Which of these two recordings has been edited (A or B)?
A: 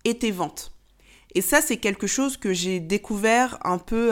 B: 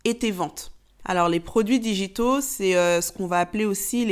B